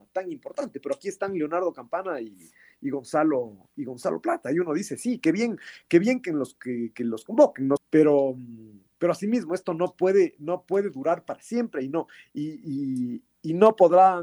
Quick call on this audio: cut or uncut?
cut